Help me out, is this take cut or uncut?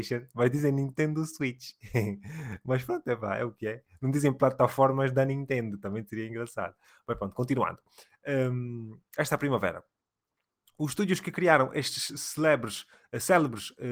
uncut